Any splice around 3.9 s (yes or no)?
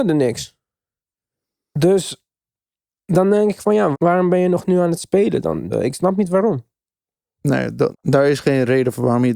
yes